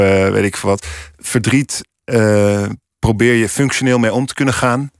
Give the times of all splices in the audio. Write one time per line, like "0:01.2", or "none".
none